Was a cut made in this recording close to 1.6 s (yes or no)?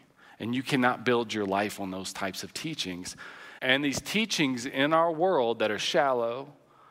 no